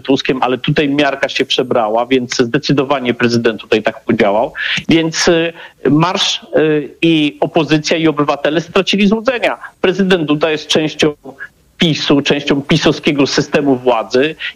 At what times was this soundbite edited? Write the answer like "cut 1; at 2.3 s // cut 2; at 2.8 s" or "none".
cut 1; at 4.8 s

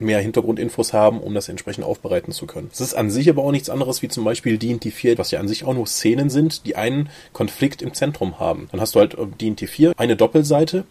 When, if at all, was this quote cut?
cut 1; at 5.2 s // cut 2; at 9.9 s

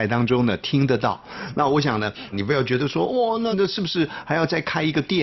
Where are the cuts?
cut 1; at 2.3 s // cut 2; at 3.5 s

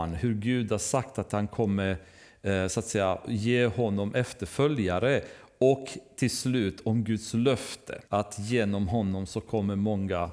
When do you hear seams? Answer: cut 1; at 8.1 s

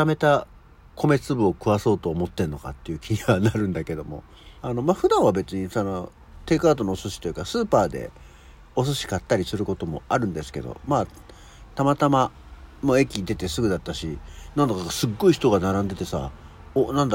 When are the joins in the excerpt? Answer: cut 1; at 4.6 s

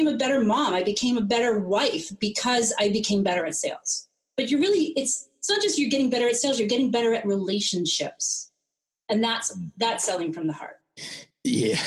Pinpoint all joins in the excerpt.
none

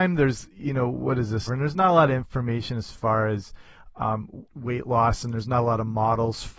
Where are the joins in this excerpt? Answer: cut 1; at 1.5 s // cut 2; at 4.5 s

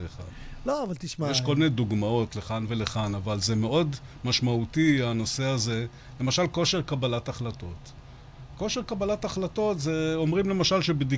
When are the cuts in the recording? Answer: none

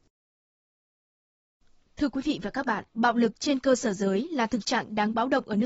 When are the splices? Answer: cut 1; at 2.9 s

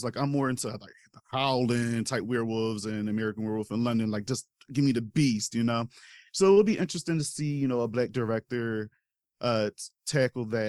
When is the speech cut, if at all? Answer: none

